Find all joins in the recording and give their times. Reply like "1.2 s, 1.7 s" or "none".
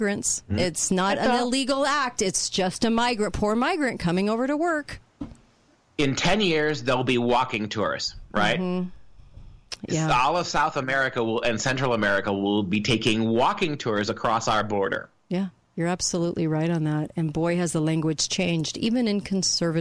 none